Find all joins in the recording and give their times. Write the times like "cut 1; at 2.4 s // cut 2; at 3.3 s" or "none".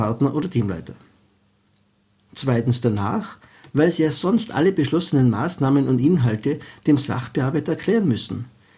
cut 1; at 2.2 s